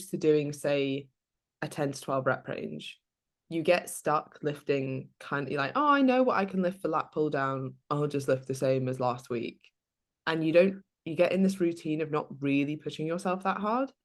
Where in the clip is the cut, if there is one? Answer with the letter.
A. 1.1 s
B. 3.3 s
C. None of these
C